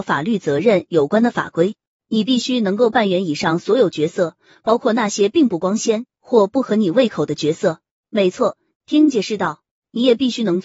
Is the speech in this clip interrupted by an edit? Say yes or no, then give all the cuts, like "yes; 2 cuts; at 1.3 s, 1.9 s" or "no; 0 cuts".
yes; 1 cut; at 8.7 s